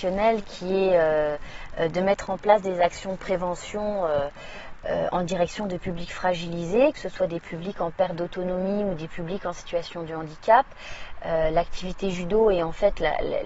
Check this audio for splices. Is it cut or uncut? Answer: uncut